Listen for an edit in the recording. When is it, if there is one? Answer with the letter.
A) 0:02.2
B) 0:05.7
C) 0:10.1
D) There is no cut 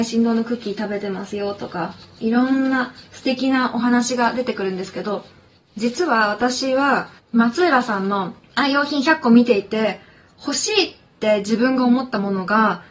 A